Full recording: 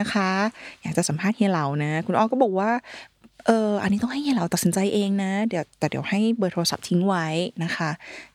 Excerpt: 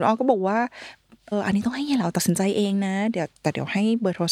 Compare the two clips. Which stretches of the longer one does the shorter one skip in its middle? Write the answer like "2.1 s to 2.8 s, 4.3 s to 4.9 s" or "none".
3.4 s to 3.7 s